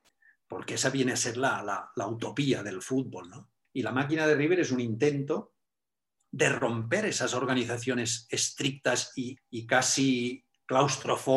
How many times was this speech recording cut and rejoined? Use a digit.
2